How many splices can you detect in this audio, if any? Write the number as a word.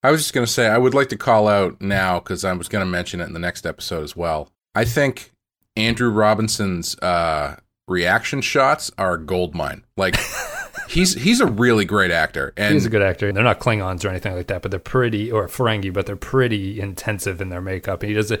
two